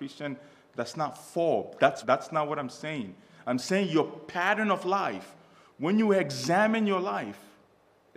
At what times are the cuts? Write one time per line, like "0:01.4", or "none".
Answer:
0:02.0